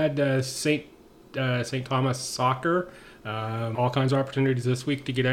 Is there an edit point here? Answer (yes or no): yes